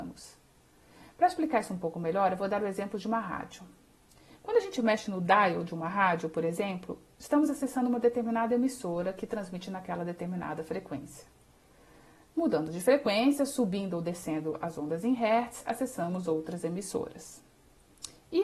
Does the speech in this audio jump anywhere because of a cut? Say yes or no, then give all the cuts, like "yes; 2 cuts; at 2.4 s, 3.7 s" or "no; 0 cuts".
no; 0 cuts